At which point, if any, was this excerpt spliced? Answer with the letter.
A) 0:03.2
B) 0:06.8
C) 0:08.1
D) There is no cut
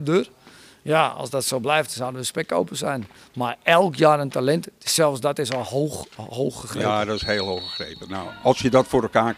D